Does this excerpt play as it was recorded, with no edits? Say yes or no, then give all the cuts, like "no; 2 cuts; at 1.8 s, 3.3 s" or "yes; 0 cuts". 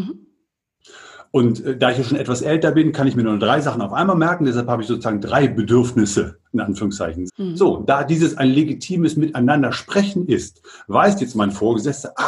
no; 1 cut; at 7.3 s